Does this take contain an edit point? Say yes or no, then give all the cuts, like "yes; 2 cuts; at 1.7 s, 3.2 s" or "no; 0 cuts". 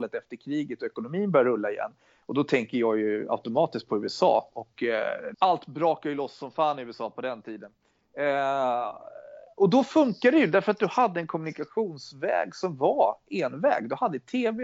yes; 1 cut; at 5.3 s